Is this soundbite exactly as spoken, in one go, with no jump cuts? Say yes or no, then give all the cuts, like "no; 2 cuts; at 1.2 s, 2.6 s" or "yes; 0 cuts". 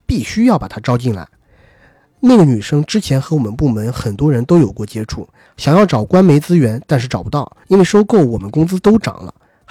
no; 2 cuts; at 5.5 s, 7.6 s